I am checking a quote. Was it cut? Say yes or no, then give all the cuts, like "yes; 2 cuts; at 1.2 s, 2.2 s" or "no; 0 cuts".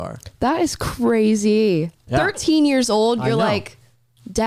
no; 0 cuts